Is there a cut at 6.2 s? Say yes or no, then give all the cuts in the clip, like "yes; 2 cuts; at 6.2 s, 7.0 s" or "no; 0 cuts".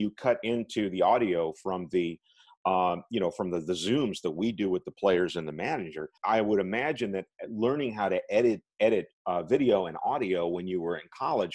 yes; 1 cut; at 6.2 s